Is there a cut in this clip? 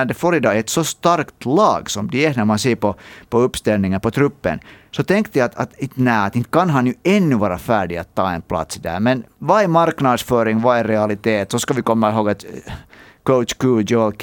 no; 0 cuts

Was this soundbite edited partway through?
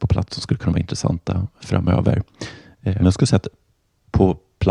yes; 1 cut; at 3.0 s

